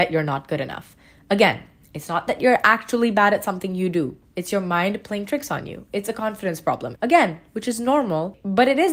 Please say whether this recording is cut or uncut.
cut